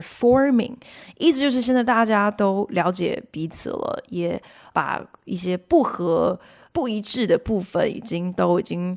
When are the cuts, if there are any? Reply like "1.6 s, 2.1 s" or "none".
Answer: none